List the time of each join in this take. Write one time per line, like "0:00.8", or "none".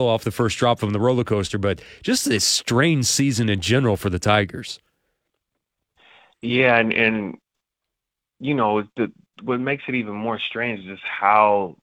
none